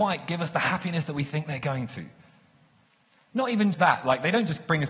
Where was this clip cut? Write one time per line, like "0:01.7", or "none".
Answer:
0:03.7